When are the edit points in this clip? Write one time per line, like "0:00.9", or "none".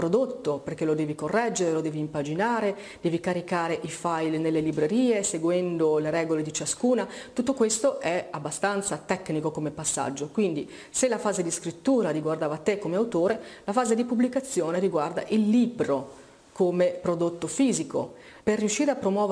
0:18.4

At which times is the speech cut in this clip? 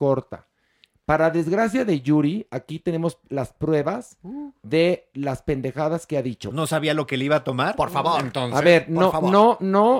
0:06.5

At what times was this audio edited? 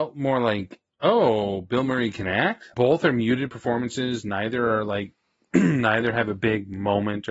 0:02.7

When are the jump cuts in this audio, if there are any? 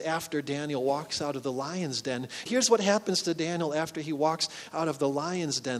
0:02.5

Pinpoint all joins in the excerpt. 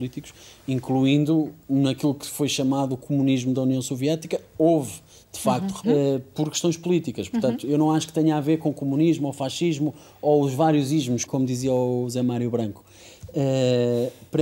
0:05.8
0:11.3

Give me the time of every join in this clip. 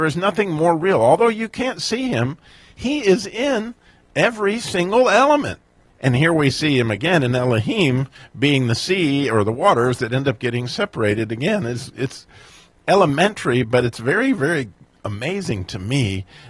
0:05.9

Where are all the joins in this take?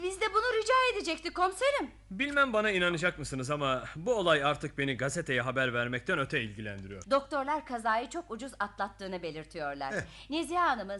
0:07.0

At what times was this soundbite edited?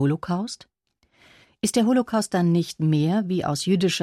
none

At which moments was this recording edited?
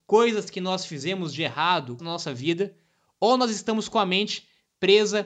0:02.0

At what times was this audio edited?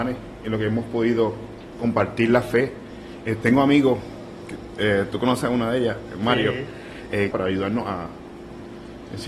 0:03.2
0:07.3

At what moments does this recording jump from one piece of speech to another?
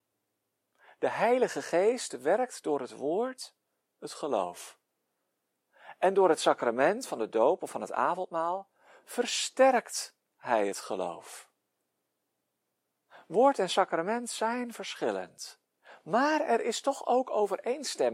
none

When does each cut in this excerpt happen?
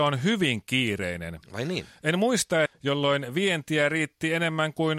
0:02.7

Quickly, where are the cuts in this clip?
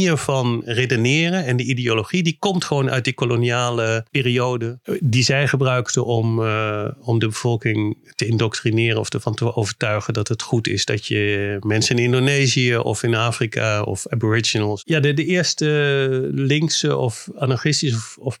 none

